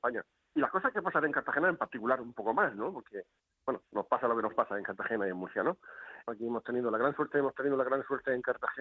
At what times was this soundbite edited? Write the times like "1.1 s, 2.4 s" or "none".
6.3 s